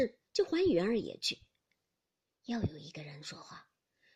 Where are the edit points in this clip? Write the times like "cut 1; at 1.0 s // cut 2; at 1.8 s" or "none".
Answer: none